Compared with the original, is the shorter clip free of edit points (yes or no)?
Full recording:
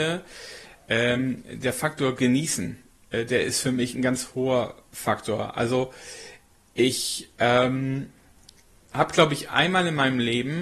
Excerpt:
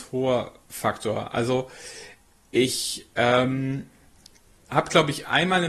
yes